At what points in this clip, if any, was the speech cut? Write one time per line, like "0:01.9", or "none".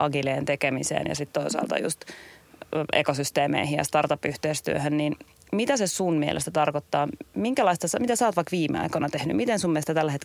none